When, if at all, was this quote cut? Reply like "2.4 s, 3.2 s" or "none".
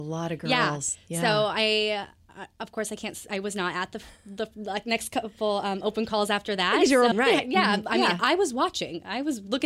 7.1 s

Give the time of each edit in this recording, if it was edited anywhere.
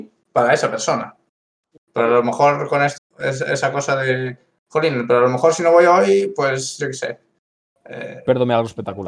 1.8 s, 3.0 s

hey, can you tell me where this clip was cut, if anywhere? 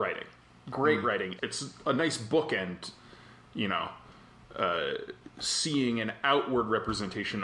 1.4 s

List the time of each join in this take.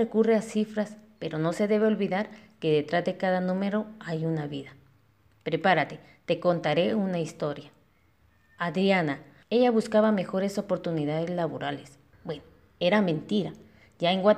9.4 s, 12.1 s

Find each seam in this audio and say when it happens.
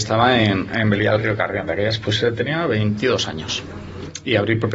none

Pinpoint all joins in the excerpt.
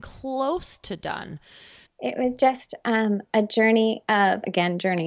1.9 s

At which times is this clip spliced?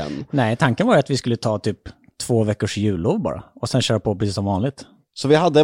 none

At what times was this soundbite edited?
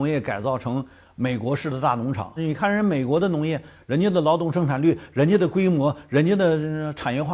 2.4 s

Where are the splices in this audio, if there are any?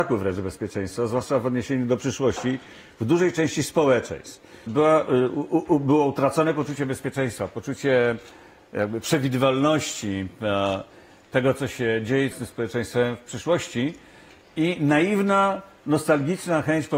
4.7 s, 12.3 s

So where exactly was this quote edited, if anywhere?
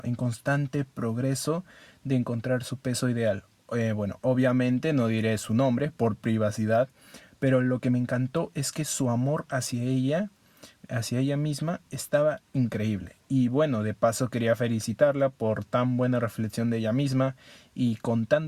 none

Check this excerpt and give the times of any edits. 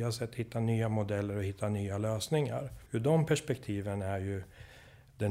2.9 s

